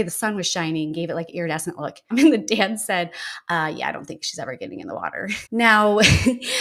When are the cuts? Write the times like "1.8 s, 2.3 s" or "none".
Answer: 2.1 s, 5.4 s